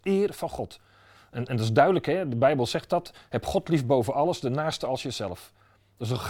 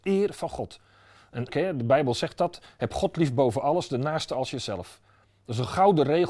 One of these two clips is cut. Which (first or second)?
second